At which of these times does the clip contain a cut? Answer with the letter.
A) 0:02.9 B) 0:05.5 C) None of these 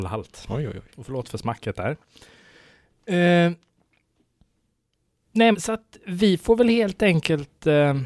B